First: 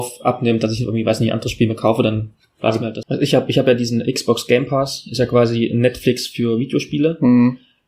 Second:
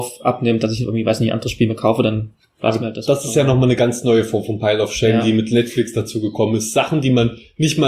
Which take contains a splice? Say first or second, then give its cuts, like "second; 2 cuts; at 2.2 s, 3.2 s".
first; 1 cut; at 3.0 s